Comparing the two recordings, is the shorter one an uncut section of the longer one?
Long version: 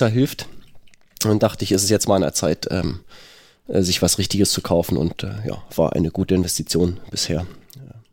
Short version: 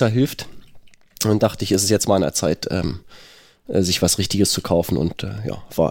yes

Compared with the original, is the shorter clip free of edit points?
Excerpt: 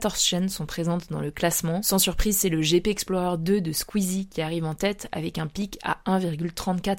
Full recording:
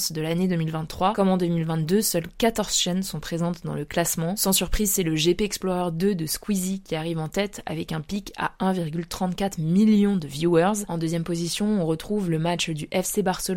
yes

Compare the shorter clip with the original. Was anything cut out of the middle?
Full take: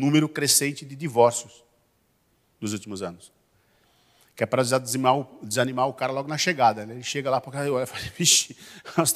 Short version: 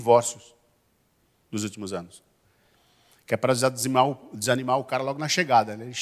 no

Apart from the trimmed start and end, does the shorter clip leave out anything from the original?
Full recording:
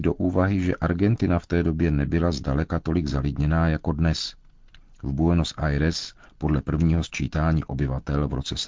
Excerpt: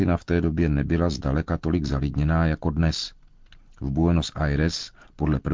no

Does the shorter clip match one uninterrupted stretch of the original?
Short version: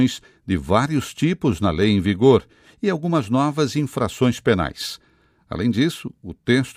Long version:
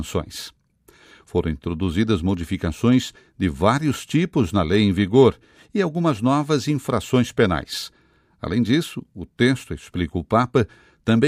yes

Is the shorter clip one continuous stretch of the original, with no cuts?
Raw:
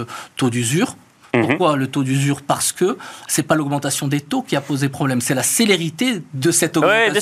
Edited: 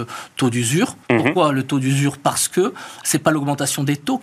no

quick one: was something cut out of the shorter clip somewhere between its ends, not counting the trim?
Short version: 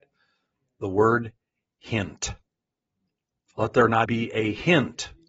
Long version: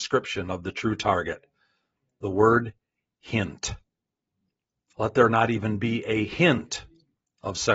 yes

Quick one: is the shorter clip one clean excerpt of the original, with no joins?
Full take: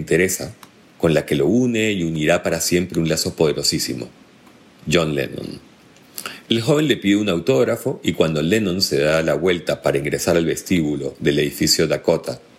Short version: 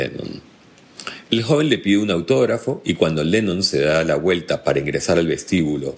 yes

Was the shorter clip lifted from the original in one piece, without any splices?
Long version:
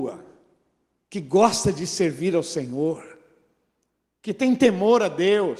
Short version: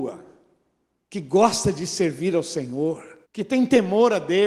no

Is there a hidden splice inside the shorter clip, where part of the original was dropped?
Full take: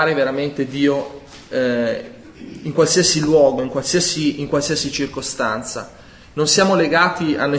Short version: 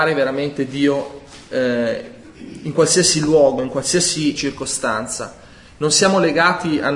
yes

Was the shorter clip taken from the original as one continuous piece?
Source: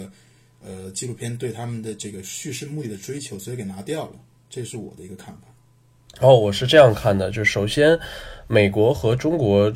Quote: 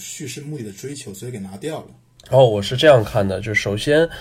no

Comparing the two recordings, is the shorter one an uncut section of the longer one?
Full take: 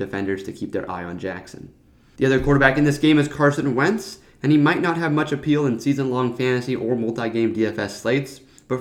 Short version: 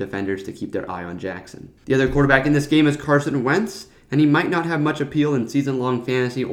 no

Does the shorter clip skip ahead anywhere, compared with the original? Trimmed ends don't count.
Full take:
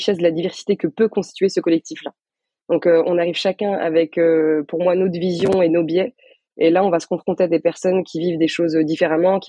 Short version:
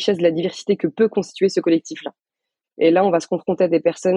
yes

